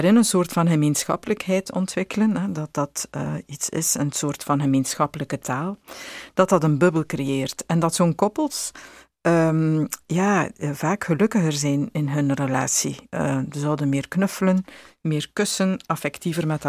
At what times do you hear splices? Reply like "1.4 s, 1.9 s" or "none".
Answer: none